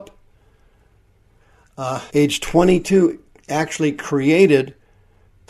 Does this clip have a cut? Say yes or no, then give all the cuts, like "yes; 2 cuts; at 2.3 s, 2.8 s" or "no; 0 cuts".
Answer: yes; 1 cut; at 2.1 s